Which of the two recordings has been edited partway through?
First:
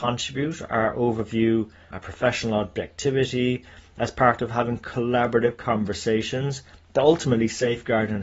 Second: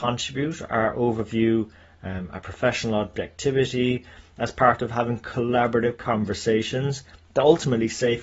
first; 1 cut; at 1.9 s

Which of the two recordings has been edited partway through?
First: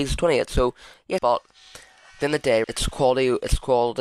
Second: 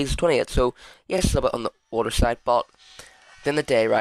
first; 2 cuts; at 1.2 s, 2.6 s

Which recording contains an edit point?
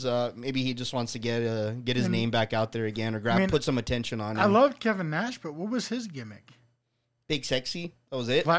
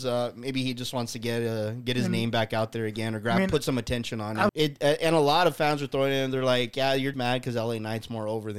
second; 2 cuts; at 4.5 s, 7.1 s

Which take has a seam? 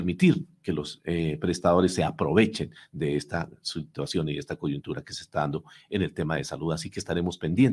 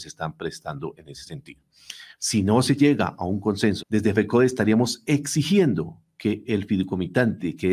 second; 2 cuts; at 2.2 s, 3.8 s

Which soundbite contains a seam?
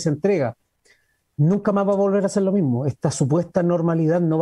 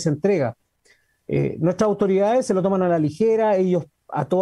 first; 1 cut; at 1.2 s

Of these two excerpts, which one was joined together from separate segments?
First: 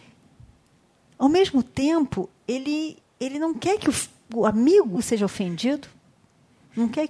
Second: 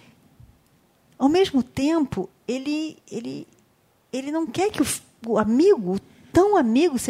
first; 2 cuts; at 3.0 s, 5.0 s

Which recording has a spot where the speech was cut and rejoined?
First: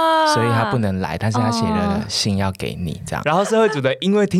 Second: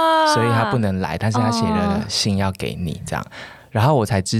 first; 1 cut; at 3.2 s

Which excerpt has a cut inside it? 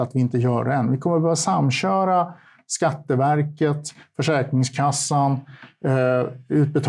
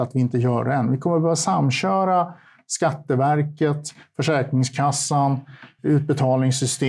second; 1 cut; at 5.8 s

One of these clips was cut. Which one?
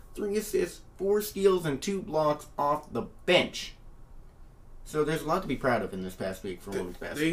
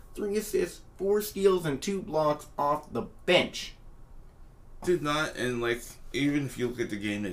second; 2 cuts; at 4.8 s, 6.1 s

